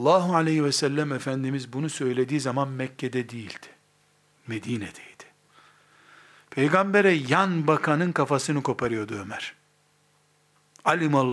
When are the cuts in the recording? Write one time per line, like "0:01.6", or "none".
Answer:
none